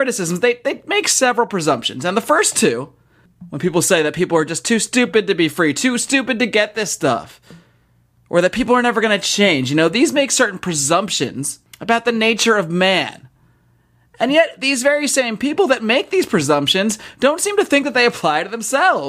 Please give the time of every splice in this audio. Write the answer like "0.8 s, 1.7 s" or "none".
none